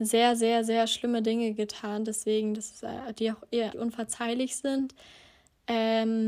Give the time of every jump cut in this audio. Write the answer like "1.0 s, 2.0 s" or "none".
3.7 s